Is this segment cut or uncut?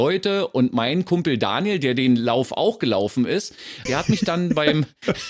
cut